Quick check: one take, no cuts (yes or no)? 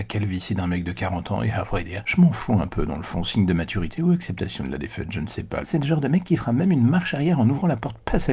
no